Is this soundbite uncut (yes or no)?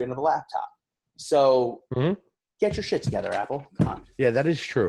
yes